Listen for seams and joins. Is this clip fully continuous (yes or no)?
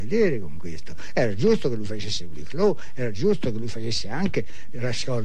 yes